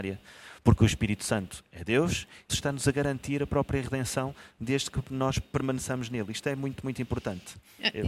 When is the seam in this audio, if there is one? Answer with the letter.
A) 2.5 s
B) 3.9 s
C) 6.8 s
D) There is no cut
A